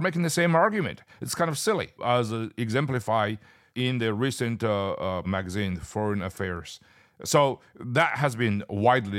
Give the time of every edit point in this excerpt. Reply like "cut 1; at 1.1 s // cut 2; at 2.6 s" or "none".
cut 1; at 5.2 s